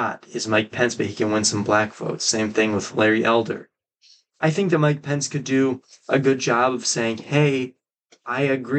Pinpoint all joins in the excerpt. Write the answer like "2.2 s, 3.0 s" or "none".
4.3 s